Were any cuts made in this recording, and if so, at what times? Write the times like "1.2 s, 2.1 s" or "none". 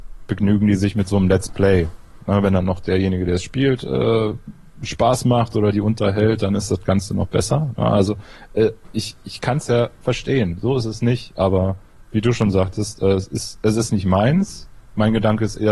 none